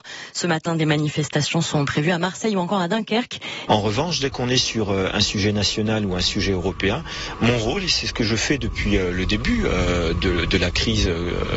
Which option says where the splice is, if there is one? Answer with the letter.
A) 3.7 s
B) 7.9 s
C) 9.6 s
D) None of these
A